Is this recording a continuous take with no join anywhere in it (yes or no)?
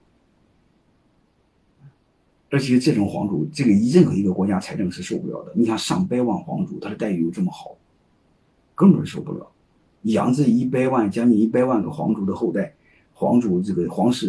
yes